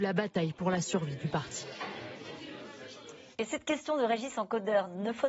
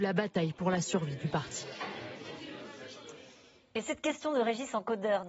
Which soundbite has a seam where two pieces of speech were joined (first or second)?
first